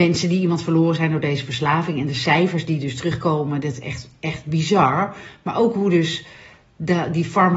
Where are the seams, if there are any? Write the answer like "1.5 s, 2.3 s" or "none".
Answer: none